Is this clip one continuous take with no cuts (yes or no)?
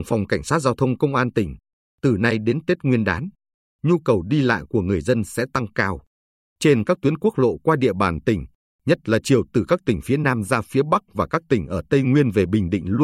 yes